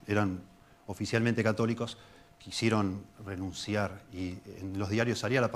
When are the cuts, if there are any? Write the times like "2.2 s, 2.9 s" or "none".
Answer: none